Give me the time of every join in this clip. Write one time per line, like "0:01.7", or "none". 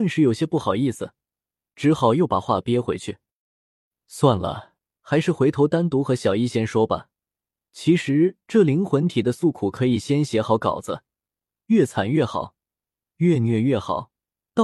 none